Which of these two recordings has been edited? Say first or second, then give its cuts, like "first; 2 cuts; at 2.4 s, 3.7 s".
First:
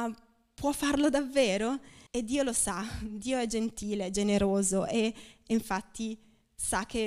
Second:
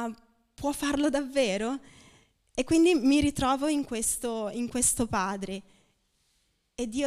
first; 1 cut; at 2.1 s